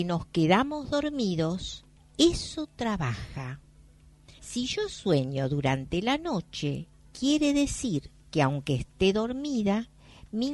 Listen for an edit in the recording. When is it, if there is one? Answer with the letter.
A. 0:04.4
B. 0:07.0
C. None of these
A